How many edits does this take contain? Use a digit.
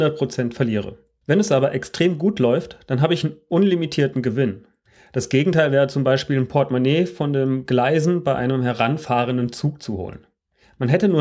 1